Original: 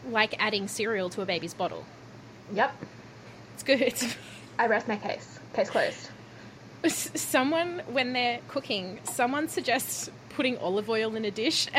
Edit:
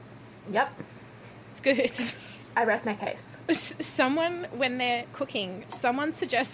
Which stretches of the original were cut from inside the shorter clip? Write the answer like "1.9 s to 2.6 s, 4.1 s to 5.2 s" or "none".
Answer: 5.5 s to 6.8 s